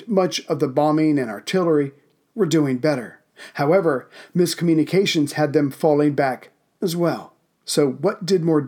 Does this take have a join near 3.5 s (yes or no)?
no